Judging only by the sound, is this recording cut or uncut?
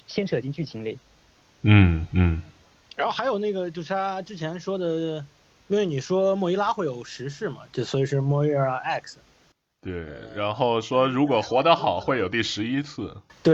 uncut